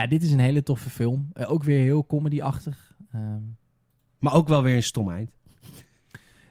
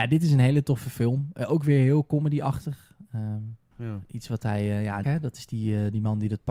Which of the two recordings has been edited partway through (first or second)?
second